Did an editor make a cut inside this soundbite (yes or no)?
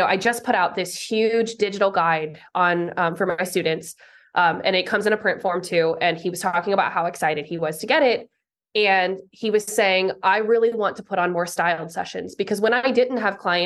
no